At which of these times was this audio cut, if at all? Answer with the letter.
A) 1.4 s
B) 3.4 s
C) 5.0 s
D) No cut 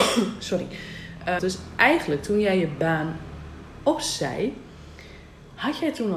A